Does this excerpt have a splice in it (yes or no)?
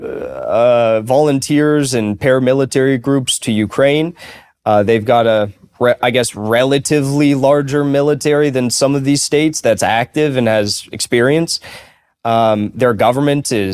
no